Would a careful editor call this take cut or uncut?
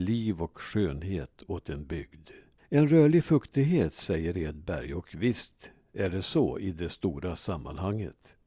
cut